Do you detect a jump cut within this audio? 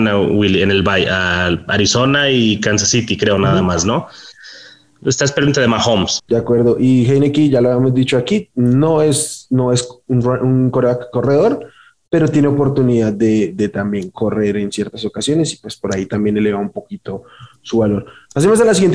yes; 1 cut; at 6.2 s

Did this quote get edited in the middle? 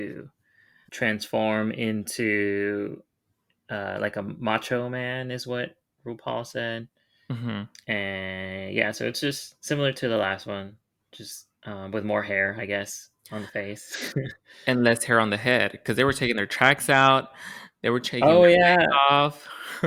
yes; 2 cuts; at 11.5 s, 13.2 s

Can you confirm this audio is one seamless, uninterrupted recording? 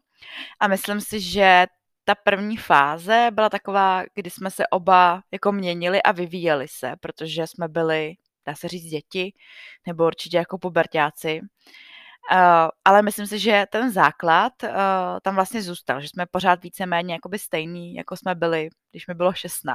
yes; 0 cuts

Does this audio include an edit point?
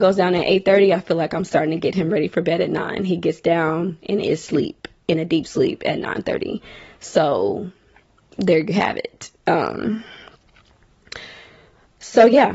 no; 0 cuts

